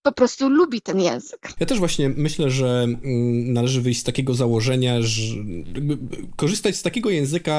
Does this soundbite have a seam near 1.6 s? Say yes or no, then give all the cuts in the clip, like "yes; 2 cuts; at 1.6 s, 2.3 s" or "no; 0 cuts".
yes; 1 cut; at 1.6 s